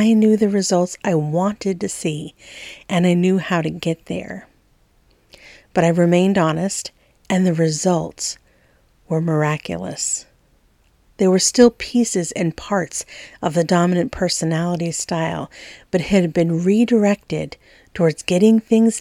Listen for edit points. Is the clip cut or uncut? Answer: uncut